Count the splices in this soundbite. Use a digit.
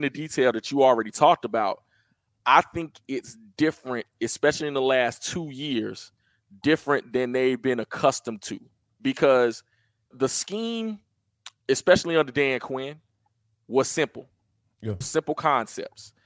2